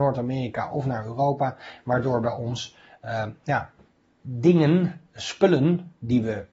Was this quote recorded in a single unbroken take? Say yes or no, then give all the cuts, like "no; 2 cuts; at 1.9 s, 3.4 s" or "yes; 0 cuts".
yes; 0 cuts